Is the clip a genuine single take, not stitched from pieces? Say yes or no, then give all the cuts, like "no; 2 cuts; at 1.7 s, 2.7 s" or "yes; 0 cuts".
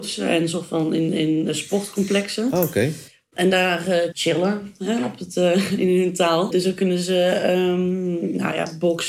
no; 2 cuts; at 4.1 s, 6.5 s